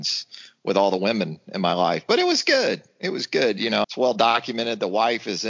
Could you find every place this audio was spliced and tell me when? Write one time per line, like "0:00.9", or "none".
0:03.8